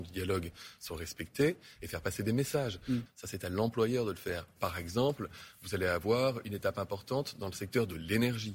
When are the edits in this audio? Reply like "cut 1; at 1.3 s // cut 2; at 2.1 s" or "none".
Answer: cut 1; at 3.1 s // cut 2; at 4.6 s